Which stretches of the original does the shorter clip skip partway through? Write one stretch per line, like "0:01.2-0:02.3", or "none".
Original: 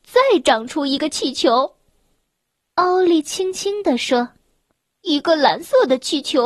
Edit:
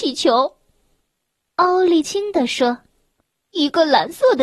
0:03.2-0:03.5